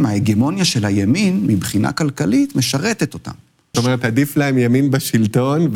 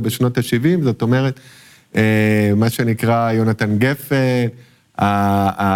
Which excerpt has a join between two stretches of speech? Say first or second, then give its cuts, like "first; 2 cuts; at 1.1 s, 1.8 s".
first; 1 cut; at 3.7 s